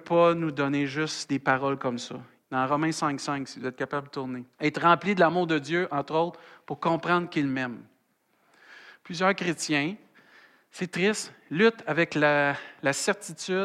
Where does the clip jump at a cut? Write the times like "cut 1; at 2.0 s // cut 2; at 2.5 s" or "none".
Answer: cut 1; at 2.4 s // cut 2; at 4.5 s